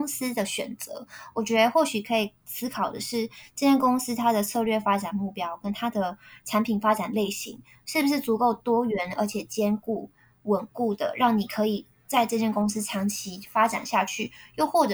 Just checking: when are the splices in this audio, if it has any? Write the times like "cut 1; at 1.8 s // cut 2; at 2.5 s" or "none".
none